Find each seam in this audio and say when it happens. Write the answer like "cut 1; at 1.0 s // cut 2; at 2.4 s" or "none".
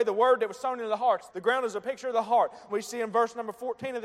cut 1; at 1.3 s // cut 2; at 2.7 s